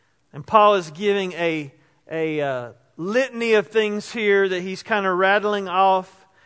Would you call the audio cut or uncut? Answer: uncut